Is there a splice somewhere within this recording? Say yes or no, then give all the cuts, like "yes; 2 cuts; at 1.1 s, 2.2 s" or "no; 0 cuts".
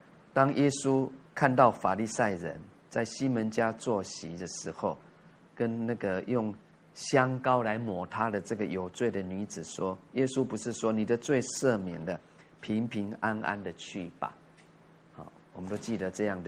yes; 1 cut; at 5.4 s